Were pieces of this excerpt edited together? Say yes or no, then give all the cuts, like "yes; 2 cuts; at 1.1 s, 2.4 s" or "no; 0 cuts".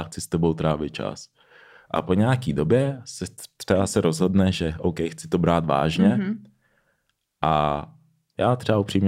no; 0 cuts